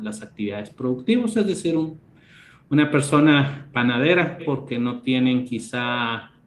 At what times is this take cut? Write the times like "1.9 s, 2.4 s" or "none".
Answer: 4.4 s